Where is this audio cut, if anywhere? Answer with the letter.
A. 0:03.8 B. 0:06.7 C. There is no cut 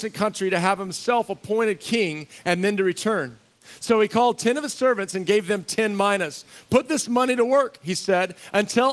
C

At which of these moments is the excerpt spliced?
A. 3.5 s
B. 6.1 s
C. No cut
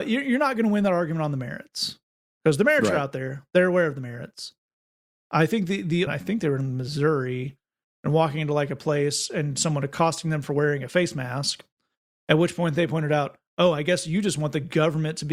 B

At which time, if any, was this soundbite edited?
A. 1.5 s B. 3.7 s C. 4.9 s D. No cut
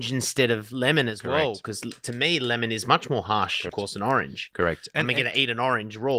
B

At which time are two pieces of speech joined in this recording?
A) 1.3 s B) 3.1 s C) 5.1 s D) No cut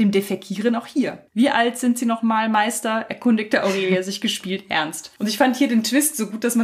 A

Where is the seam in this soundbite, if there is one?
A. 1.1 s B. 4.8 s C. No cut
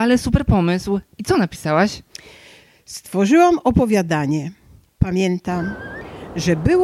C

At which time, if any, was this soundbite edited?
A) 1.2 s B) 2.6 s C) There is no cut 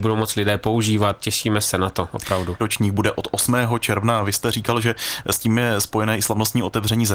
B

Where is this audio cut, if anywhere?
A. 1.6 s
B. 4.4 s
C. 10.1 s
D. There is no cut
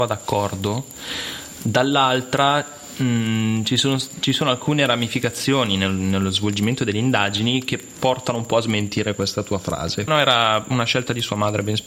C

